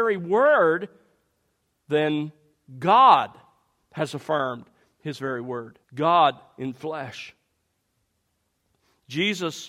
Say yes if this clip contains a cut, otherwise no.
yes